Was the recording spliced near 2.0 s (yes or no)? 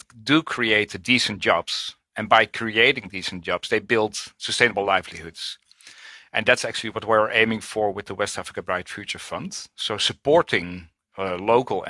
no